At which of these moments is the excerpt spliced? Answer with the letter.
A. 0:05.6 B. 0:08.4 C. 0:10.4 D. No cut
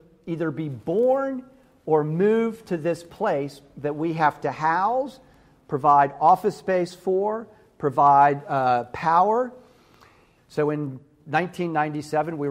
C